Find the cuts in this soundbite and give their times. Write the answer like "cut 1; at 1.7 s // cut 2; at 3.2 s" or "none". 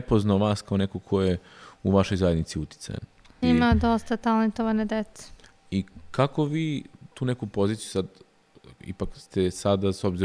cut 1; at 3.4 s // cut 2; at 8.8 s